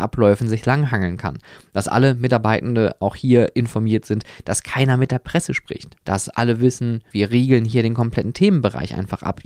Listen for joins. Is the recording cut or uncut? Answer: cut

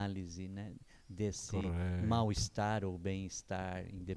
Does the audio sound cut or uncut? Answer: uncut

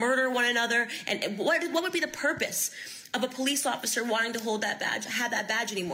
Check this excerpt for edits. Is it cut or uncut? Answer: uncut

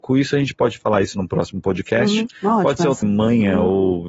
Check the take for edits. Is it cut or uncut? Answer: cut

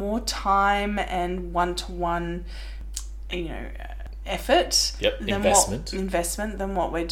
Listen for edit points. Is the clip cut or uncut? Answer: uncut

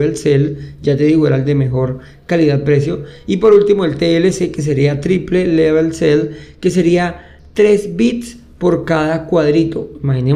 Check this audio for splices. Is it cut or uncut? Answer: uncut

